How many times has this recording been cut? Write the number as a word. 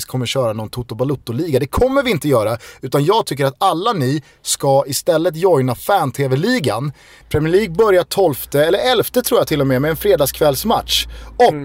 one